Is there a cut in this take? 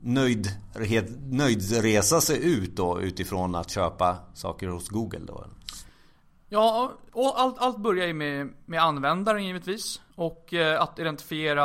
yes; 1 cut; at 10.1 s

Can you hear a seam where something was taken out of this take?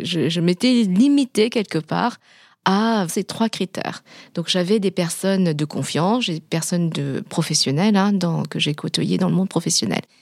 yes; 1 cut; at 3.1 s

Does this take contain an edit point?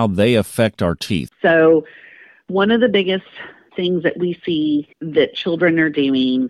yes; 2 cuts; at 1.3 s, 4.9 s

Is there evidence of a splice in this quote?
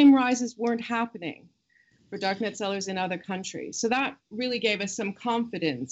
no; 0 cuts

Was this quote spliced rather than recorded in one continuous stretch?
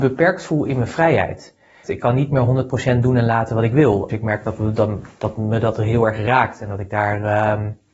yes; 2 cuts; at 1.8 s, 4.1 s

